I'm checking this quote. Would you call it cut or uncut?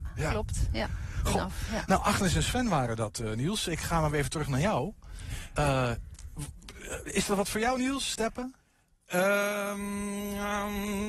uncut